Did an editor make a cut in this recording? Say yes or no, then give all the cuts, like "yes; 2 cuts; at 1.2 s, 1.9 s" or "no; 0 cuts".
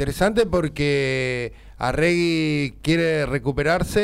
no; 0 cuts